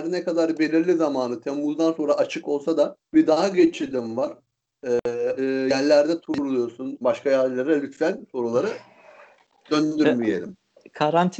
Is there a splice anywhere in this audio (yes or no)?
yes